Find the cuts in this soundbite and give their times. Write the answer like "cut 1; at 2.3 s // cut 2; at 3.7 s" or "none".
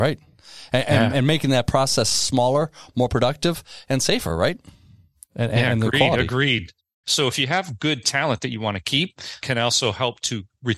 cut 1; at 7.0 s // cut 2; at 9.4 s